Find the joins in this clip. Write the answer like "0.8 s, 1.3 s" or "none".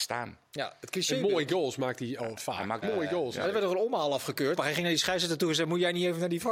2.8 s, 4.6 s

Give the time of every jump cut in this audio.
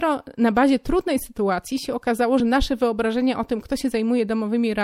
none

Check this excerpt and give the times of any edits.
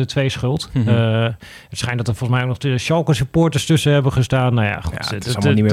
none

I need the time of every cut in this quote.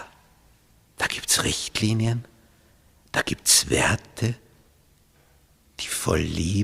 none

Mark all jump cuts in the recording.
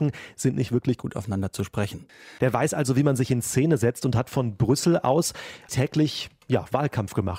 2.4 s, 5.7 s

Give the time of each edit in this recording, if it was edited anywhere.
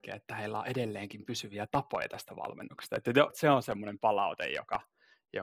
3.3 s

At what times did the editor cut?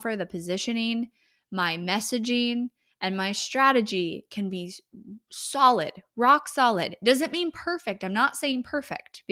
none

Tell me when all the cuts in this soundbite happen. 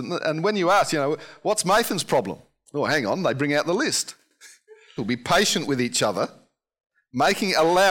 5.0 s

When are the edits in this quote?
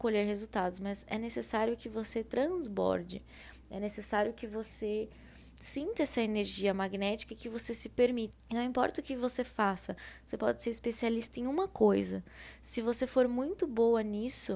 8.3 s

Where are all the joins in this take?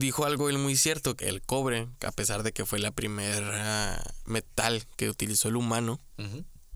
1.2 s

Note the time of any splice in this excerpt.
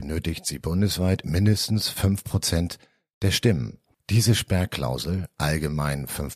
4.0 s

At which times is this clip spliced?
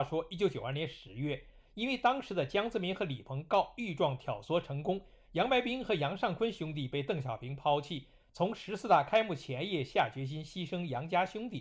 none

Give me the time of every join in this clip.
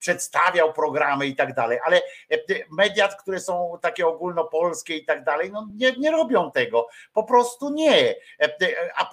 none

